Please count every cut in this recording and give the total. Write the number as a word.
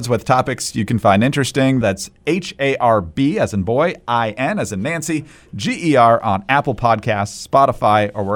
one